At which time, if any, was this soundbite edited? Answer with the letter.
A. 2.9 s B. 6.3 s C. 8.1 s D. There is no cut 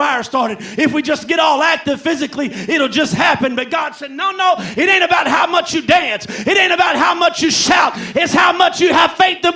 D